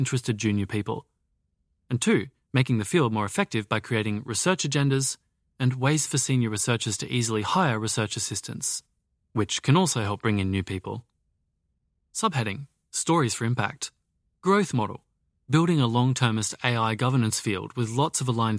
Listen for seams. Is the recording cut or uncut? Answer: uncut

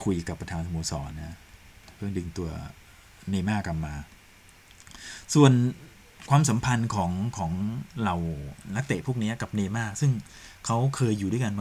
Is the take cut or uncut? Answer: cut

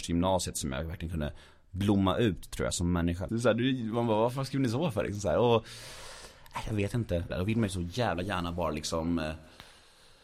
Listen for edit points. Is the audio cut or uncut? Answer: cut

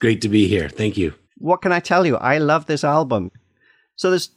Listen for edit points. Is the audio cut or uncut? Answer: cut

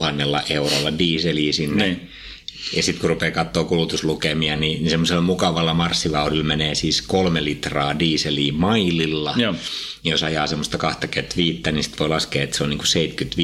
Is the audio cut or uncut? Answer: uncut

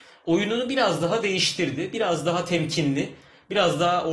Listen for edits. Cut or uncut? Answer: uncut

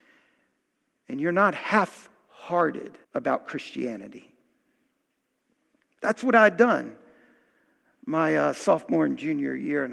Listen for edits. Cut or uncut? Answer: cut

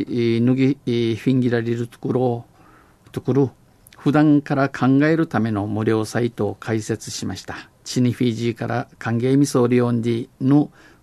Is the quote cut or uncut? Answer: uncut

